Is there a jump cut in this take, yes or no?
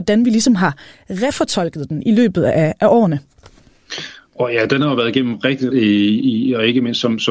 yes